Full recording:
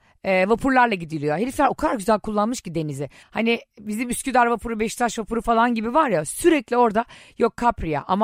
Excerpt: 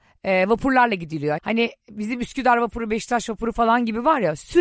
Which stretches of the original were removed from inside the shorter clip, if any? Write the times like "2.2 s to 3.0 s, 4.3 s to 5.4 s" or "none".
1.4 s to 3.3 s